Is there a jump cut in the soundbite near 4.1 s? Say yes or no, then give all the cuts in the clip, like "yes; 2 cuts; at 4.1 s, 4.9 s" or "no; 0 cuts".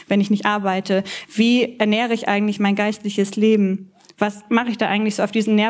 no; 0 cuts